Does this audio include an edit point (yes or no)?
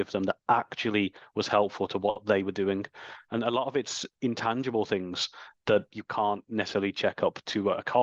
yes